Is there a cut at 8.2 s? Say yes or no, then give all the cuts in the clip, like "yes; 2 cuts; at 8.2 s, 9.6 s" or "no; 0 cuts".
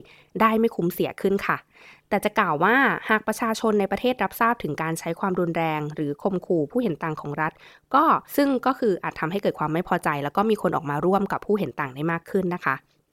yes; 1 cut; at 8.2 s